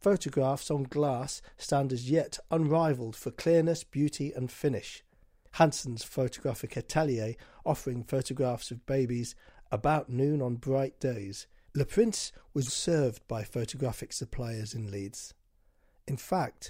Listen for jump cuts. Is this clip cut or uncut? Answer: cut